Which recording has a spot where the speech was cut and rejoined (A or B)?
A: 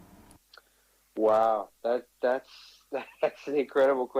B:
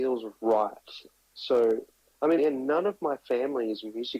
B